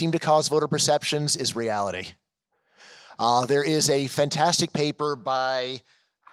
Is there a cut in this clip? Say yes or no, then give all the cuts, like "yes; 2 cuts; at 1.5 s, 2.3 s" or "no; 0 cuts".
no; 0 cuts